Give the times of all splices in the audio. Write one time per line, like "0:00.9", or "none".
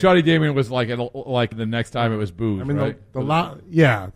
0:01.5